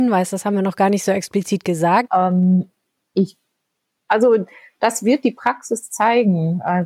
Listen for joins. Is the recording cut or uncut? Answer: cut